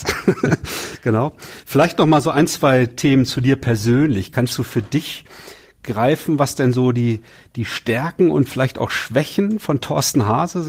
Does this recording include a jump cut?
no; 0 cuts

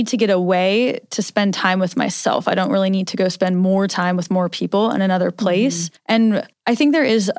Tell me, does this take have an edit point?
no; 0 cuts

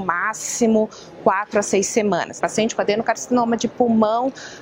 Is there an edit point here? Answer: yes; 1 cut; at 2.4 s

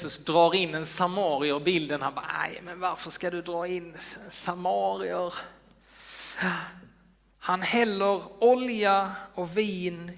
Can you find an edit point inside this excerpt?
yes; 1 cut; at 7.3 s

